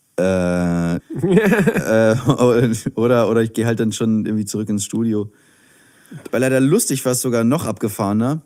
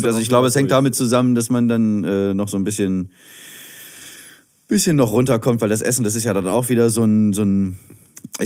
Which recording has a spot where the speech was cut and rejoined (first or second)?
first